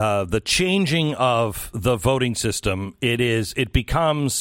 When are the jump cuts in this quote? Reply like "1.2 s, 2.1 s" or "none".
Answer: none